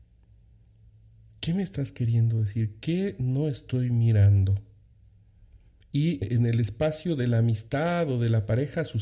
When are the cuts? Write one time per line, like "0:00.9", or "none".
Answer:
0:06.2

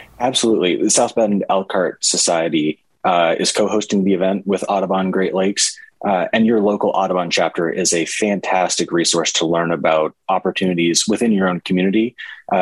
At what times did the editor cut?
none

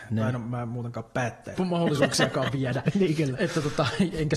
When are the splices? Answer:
0:01.5

